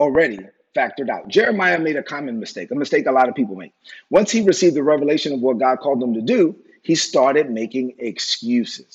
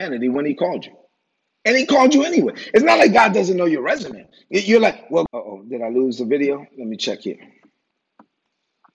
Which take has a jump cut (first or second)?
second